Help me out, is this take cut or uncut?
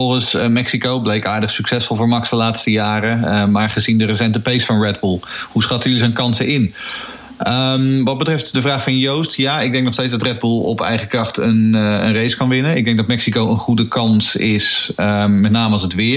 uncut